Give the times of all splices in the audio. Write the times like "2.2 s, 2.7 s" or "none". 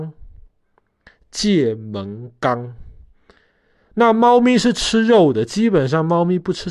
none

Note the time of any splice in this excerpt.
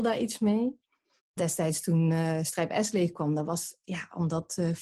1.2 s

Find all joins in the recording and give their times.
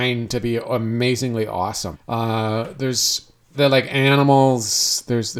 1.9 s, 3.5 s

